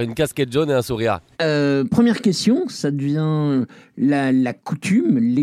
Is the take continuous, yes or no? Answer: no